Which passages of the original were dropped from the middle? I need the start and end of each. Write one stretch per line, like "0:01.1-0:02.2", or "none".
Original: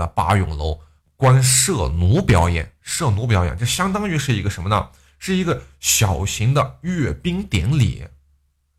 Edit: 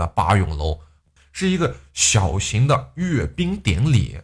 0:01.2-0:05.0